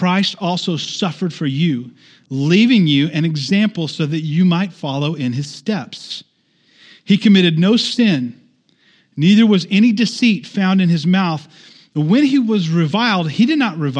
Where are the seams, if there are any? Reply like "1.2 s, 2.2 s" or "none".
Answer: none